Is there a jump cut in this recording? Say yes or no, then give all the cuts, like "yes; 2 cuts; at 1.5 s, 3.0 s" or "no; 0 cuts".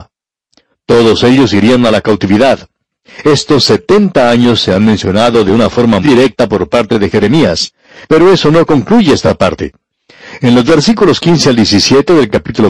yes; 1 cut; at 6.0 s